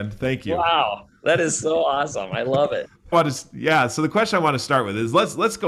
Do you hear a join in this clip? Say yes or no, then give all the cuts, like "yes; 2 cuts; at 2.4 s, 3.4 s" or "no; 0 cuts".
yes; 1 cut; at 3.1 s